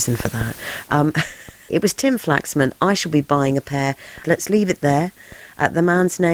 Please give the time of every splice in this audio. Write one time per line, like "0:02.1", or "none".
0:01.7
0:04.2